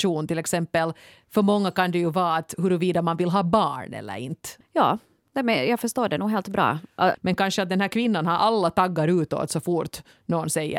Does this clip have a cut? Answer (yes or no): yes